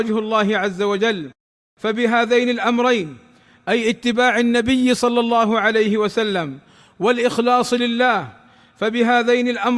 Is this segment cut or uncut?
uncut